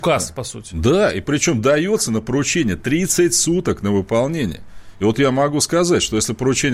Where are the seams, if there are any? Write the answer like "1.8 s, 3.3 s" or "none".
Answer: none